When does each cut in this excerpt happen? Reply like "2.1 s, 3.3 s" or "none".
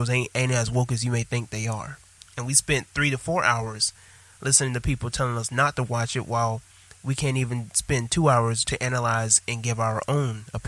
2.2 s, 8.6 s